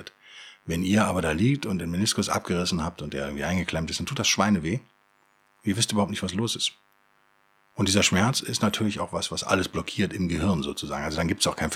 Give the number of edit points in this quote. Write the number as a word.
zero